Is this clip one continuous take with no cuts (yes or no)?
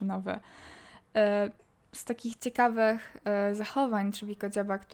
yes